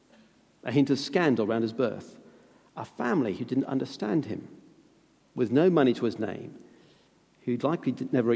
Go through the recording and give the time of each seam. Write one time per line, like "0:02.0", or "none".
none